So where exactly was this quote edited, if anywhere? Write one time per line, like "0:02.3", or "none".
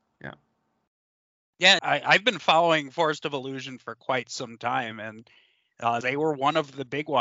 0:01.8
0:06.0